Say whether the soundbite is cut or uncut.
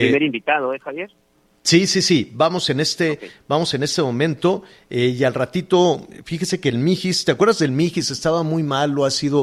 uncut